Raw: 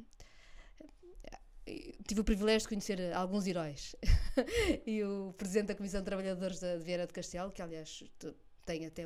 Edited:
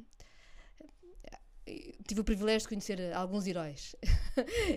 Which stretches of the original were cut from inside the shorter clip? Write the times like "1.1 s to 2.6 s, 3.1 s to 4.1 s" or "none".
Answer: none